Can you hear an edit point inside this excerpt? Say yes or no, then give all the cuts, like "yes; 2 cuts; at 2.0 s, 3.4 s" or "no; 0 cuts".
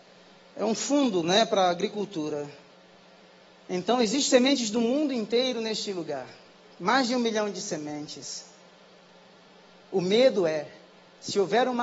no; 0 cuts